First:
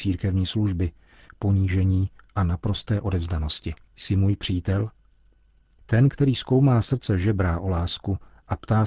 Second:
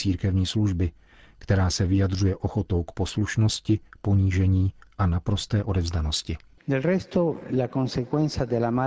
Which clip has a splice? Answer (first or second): first